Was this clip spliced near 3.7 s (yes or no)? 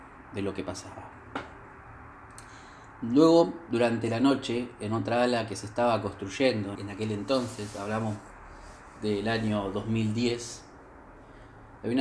yes